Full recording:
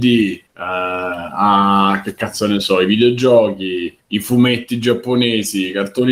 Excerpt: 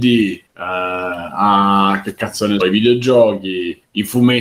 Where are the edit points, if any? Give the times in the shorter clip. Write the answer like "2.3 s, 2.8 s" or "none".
2.6 s